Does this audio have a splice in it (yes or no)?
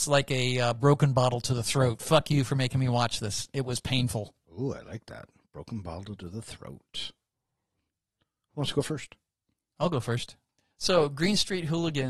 no